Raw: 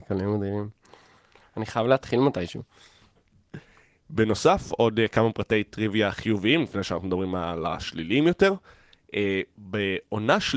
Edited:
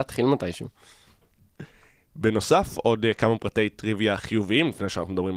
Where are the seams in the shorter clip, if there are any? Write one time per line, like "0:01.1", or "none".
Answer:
none